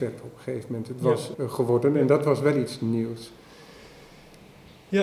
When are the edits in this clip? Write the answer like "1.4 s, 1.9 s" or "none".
1.3 s

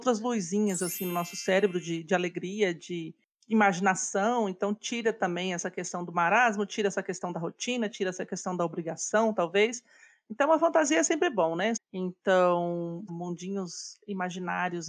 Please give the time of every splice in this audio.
11.8 s, 13.1 s

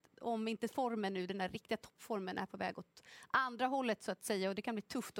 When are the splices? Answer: none

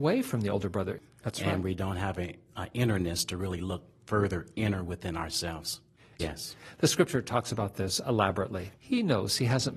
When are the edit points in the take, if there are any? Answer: 1.1 s, 6.2 s, 8.7 s

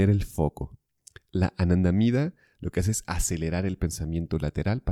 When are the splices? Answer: none

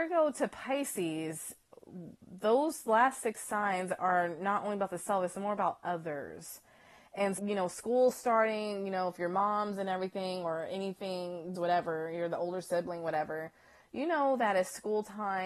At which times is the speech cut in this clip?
7.4 s, 11.5 s

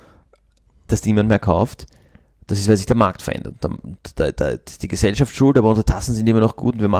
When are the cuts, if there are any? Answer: none

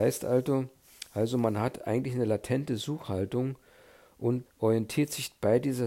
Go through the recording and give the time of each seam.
4.5 s

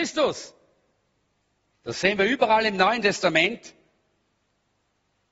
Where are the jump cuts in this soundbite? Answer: none

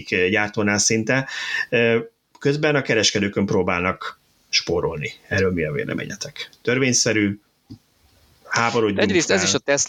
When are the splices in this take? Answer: none

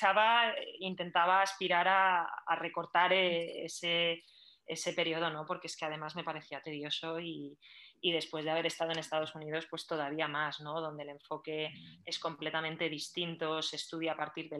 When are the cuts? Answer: none

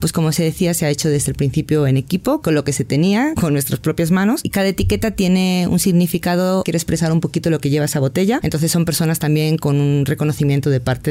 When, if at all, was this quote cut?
8.4 s

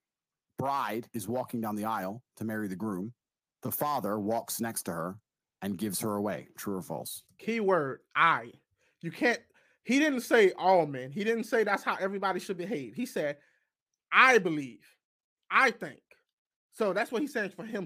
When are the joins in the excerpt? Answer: none

